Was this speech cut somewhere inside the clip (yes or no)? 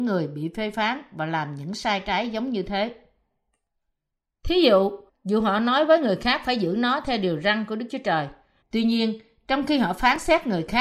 yes